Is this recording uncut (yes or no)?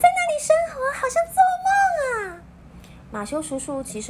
yes